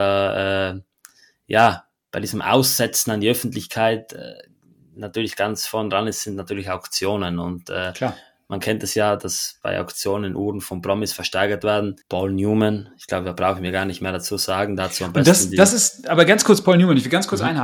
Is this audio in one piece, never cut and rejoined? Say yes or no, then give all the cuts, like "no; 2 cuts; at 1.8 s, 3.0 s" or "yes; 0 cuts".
no; 1 cut; at 12.0 s